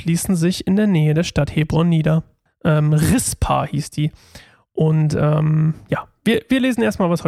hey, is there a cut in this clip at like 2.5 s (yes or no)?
yes